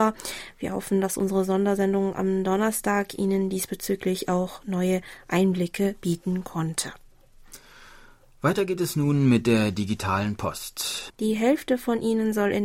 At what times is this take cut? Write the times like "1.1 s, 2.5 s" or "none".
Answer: 11.1 s